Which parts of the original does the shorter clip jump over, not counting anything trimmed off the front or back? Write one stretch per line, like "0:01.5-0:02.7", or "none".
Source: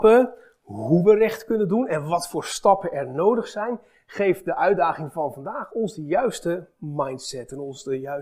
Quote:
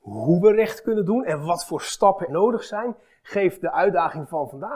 0:02.9-0:03.1